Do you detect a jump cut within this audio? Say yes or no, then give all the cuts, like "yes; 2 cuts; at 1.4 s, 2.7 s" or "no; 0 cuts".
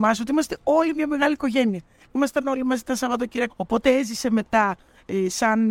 yes; 1 cut; at 3.5 s